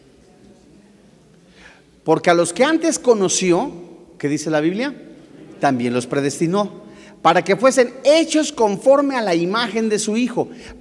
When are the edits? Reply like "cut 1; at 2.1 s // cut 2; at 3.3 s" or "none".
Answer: none